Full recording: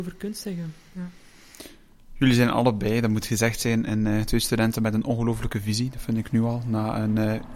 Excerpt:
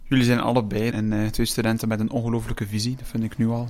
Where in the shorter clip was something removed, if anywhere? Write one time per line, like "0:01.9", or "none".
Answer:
0:00.9

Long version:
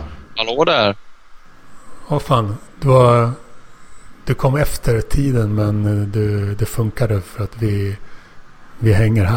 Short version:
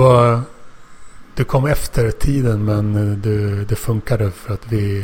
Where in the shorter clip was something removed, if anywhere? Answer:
none

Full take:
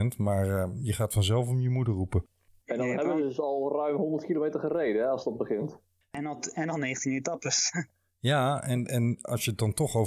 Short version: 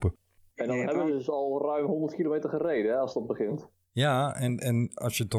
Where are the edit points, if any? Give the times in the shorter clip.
0:03.8

